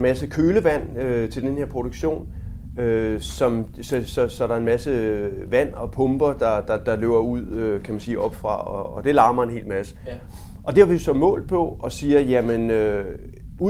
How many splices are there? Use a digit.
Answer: 0